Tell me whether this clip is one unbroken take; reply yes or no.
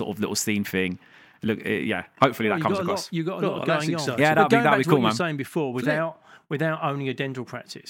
yes